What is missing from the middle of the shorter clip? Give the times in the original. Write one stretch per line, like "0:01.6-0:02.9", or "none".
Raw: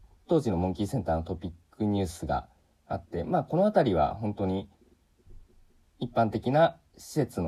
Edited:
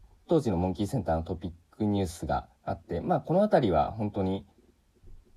0:02.5-0:02.8